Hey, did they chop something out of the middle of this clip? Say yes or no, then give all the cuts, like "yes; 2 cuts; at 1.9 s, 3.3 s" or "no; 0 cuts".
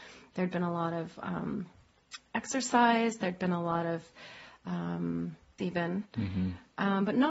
yes; 1 cut; at 5.6 s